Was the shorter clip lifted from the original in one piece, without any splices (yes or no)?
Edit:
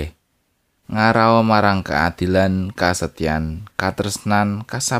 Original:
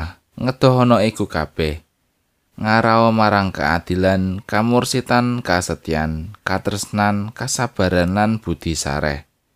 no